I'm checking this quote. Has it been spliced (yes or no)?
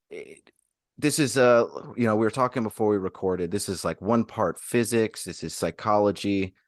no